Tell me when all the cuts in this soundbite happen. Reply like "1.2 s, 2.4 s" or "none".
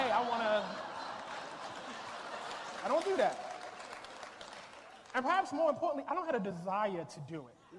2.8 s